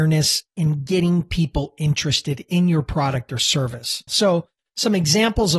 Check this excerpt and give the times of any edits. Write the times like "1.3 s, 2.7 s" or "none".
4.1 s